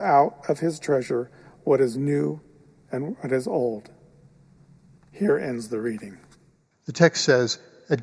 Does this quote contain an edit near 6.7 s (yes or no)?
yes